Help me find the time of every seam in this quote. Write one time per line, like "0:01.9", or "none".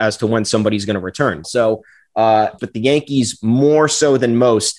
0:01.4
0:02.6